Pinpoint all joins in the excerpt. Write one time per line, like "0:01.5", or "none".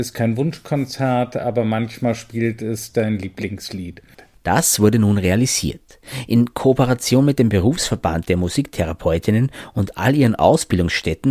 none

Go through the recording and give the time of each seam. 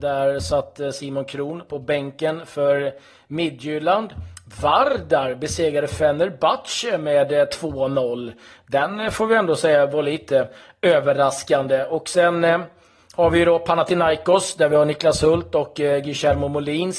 none

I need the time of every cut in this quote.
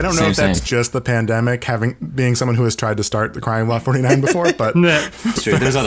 none

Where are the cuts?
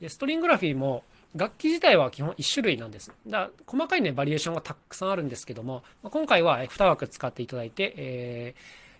0:06.6

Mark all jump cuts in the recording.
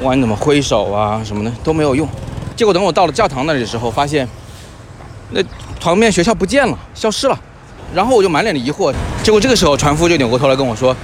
0:02.5

